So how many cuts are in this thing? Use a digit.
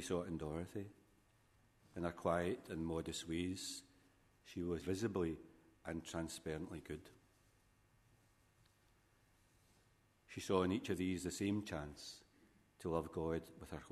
2